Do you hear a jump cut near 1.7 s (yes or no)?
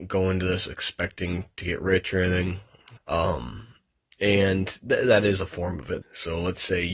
no